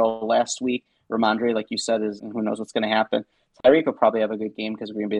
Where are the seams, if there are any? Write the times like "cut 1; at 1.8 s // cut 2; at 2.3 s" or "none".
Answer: cut 1; at 2.2 s